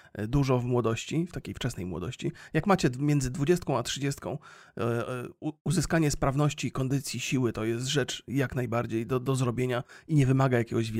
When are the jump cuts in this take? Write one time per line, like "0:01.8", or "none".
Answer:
none